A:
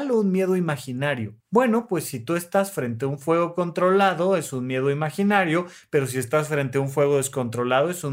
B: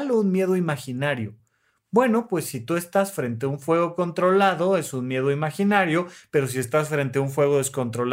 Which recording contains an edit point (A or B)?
A